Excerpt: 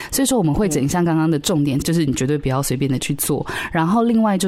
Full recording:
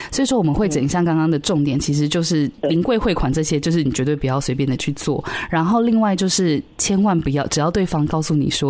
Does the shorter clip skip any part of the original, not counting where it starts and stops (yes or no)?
yes